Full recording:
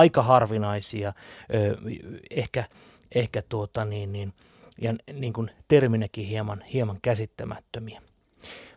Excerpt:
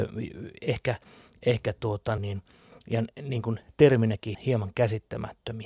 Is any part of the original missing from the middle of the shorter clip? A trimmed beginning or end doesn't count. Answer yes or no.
yes